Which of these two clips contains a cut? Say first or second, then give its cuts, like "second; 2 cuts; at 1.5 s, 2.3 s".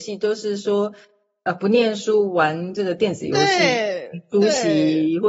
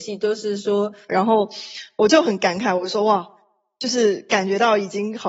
second; 1 cut; at 1.1 s